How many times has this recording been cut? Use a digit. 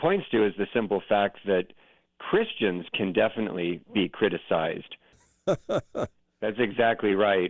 1